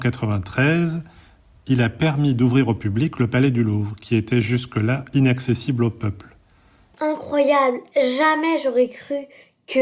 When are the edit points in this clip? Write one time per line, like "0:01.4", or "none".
0:06.9